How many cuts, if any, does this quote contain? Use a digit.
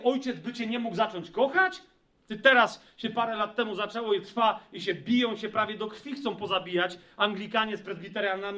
1